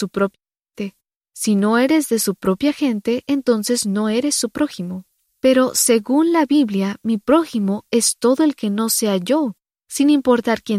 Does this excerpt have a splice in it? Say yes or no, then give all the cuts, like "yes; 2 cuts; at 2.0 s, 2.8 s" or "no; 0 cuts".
no; 0 cuts